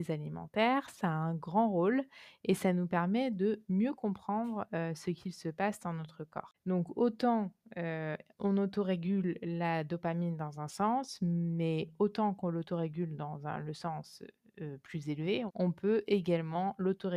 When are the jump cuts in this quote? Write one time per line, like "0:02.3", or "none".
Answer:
0:06.5
0:15.5